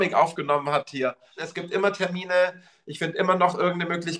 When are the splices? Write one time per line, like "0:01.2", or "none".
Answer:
0:01.4